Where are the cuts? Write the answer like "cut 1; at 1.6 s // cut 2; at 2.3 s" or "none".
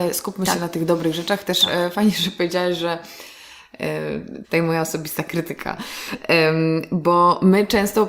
cut 1; at 4.4 s